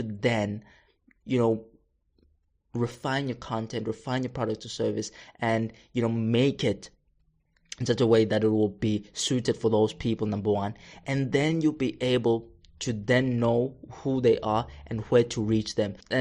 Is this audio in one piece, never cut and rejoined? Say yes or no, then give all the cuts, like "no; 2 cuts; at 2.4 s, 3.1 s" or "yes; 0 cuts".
yes; 0 cuts